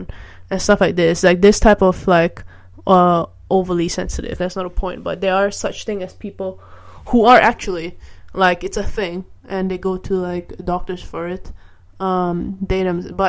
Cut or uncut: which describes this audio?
cut